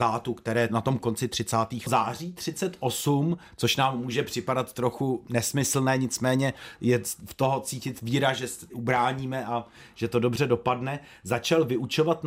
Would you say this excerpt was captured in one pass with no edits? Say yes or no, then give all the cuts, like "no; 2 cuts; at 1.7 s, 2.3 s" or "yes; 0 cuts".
no; 1 cut; at 1.9 s